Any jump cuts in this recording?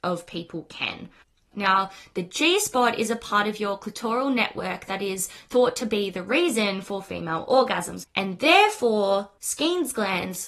yes; 1 cut; at 1.5 s

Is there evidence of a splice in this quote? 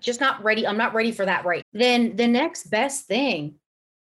yes; 1 cut; at 1.6 s

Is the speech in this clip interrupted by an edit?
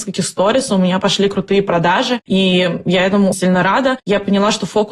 yes; 1 cut; at 3.3 s

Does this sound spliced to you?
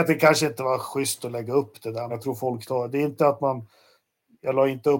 yes; 1 cut; at 2.1 s

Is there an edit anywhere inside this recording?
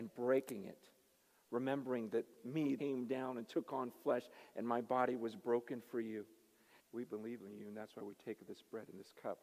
yes; 2 cuts; at 2.8 s, 6.8 s

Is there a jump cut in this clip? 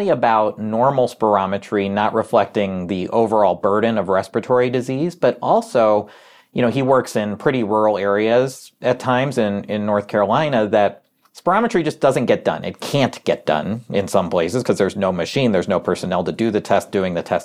no; 0 cuts

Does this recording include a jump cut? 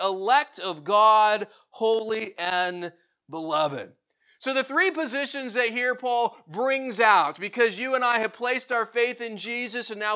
no; 0 cuts

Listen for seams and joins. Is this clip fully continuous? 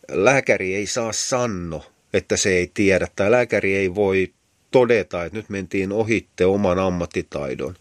yes; 0 cuts

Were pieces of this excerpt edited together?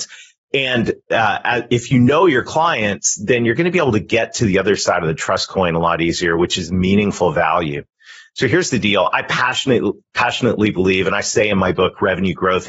no; 0 cuts

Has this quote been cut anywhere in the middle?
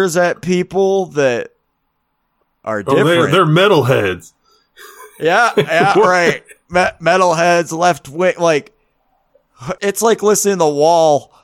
yes; 1 cut; at 9.8 s

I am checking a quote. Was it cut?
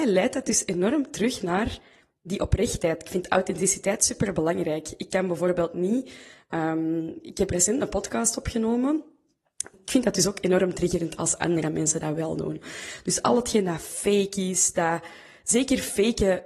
yes; 1 cut; at 9.7 s

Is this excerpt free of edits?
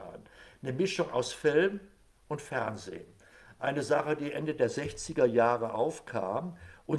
yes; 0 cuts

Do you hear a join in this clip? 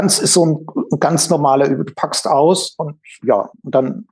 yes; 1 cut; at 3.2 s

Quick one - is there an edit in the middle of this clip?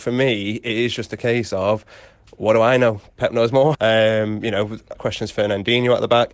yes; 2 cuts; at 3.7 s, 4.9 s

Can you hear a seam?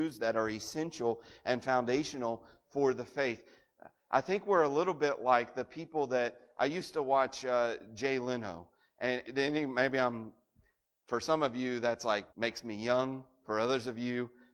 yes; 2 cuts; at 9.2 s, 12.3 s

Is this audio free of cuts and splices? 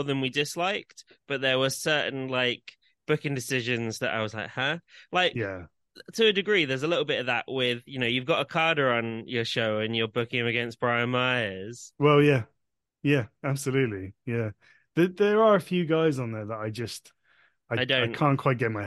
no; 1 cut; at 1.8 s

